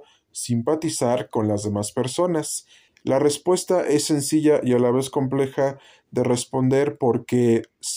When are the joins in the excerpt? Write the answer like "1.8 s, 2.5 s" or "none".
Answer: 2.9 s